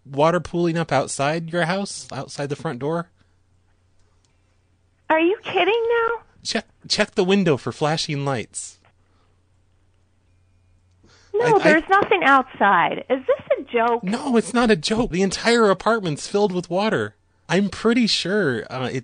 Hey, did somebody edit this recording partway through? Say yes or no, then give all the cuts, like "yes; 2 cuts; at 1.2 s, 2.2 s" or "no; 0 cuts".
yes; 2 cuts; at 15.1 s, 17.5 s